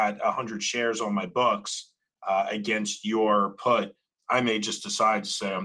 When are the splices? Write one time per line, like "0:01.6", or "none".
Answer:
none